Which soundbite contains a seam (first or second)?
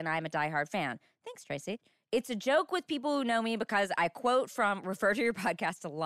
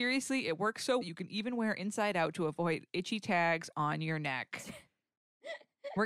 second